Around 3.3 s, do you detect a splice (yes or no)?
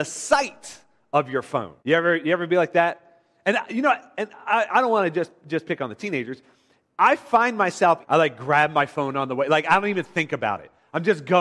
no